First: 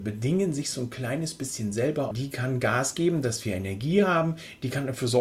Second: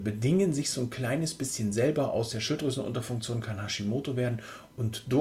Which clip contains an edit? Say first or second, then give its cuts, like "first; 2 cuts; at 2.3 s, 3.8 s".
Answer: first; 1 cut; at 2.1 s